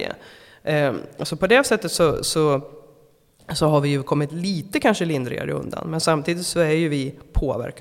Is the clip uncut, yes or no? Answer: yes